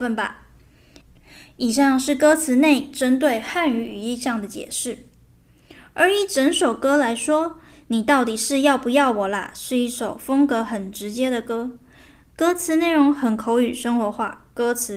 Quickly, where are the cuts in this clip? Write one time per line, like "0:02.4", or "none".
none